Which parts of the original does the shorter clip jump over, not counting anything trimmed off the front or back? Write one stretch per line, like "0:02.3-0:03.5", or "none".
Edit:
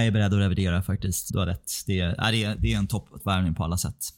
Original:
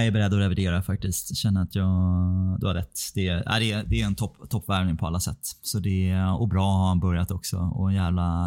0:01.3-0:02.6
0:04.5-0:04.6